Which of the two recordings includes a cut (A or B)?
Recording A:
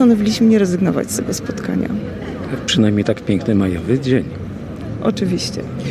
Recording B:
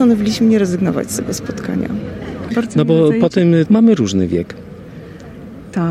B